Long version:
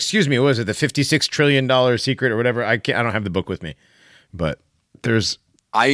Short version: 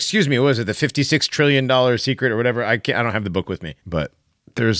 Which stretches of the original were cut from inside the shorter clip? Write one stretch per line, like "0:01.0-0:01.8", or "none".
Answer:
0:03.8-0:04.3

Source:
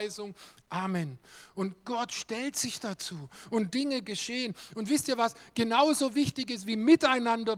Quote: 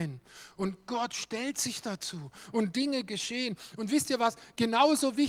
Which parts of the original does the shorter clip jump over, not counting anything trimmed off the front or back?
none

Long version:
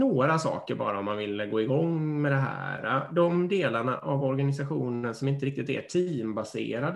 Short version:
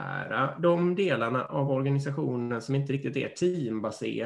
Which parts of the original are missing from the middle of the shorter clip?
none

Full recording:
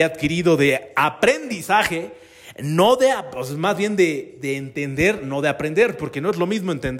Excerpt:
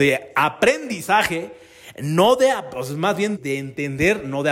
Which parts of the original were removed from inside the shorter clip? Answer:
0:04.0-0:04.3

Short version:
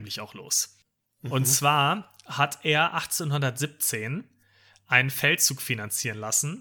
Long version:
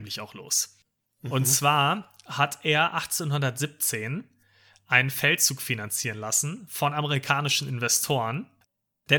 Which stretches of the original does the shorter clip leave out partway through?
none

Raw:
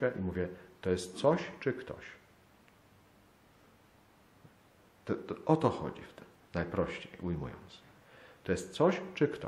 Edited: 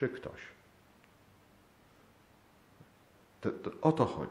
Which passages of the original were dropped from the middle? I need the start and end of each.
none

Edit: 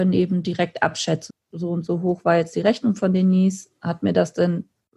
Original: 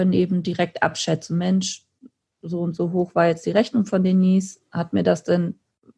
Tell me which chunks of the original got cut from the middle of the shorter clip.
0:01.3-0:02.2

